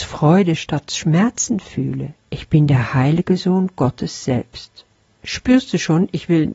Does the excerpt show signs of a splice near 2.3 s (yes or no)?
yes